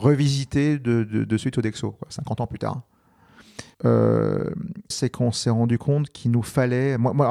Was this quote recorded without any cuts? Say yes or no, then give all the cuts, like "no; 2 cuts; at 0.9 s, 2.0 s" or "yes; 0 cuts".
no; 2 cuts; at 3.7 s, 4.9 s